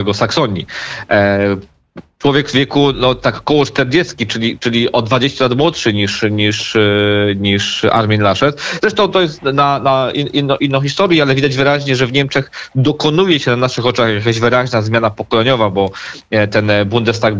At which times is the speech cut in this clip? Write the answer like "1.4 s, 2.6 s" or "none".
none